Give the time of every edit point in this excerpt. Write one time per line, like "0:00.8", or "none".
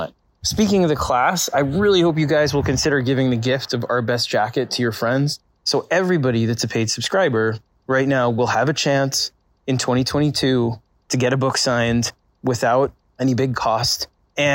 0:05.6

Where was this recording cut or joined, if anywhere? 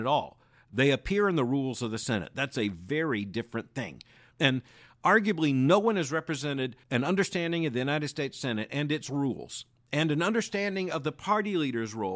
0:04.3
0:06.8

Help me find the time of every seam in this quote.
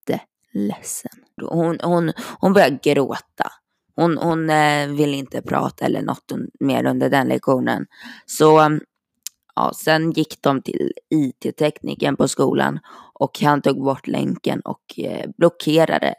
0:01.4

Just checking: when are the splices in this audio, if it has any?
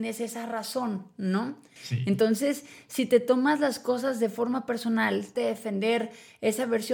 0:01.8
0:05.4

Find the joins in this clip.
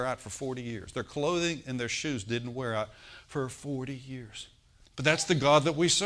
0:04.8

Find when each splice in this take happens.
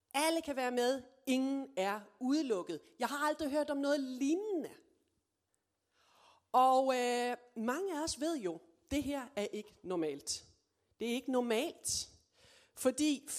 none

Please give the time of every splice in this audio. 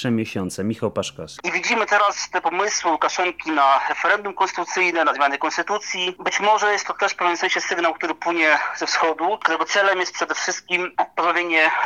0:01.4

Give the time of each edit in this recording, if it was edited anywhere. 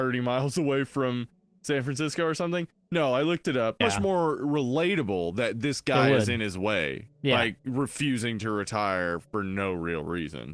0:03.8
0:07.1

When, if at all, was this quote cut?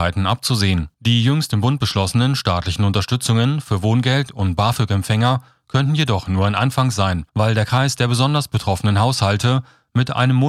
0:00.9
0:07.3

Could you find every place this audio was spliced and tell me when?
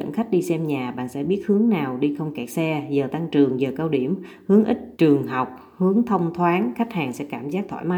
0:04.9

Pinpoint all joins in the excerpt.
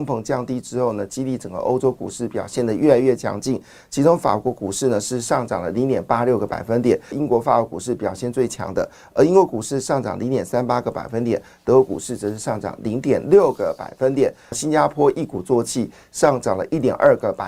0:07.1
0:14.5

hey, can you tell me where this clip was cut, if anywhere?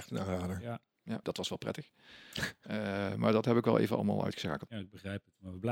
0:01.2
0:04.7

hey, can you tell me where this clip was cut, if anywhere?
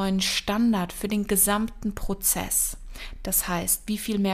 none

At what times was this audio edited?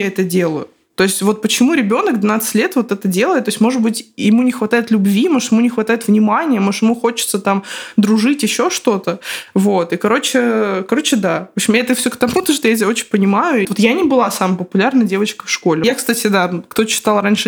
0:13.6
0:15.8

